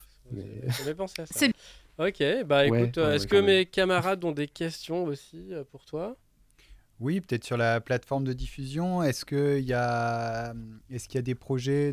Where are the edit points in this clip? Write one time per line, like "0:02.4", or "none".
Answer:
0:01.5